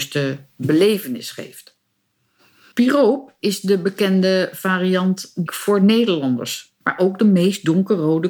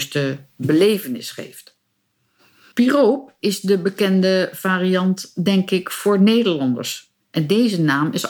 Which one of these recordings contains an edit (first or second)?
first